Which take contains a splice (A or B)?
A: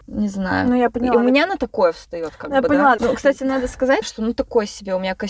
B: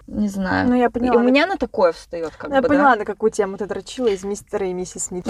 A